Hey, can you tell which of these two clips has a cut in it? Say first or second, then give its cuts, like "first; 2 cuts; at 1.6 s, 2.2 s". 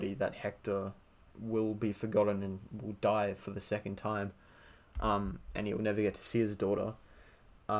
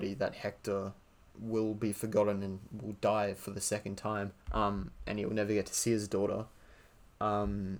second; 1 cut; at 4.4 s